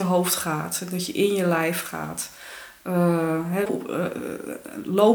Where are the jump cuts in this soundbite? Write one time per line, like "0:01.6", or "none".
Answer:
0:03.7